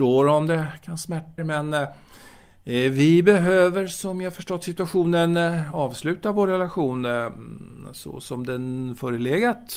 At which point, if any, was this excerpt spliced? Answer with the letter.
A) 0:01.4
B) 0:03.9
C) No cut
A